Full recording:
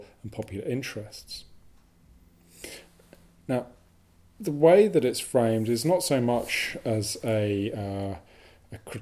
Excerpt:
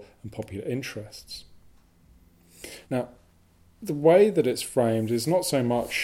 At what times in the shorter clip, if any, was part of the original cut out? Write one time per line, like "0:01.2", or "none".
0:02.8